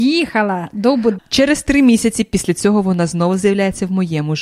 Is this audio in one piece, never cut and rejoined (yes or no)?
no